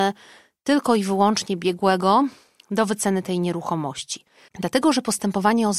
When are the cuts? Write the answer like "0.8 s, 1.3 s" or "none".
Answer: 4.5 s